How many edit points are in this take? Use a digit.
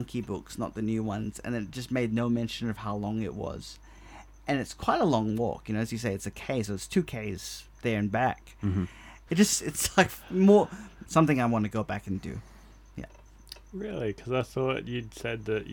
2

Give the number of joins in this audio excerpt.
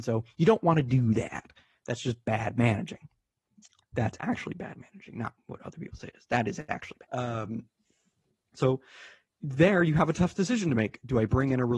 1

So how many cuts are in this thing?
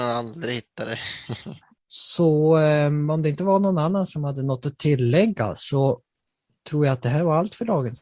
1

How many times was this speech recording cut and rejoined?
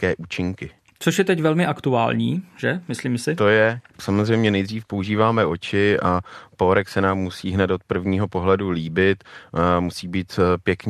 1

